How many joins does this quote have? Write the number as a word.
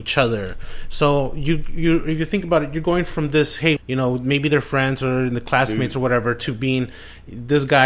one